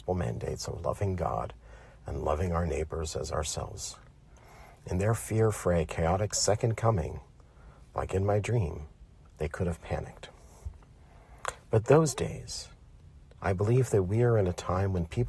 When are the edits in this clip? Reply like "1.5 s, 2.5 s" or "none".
13.4 s